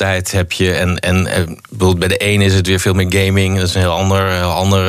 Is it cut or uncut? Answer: uncut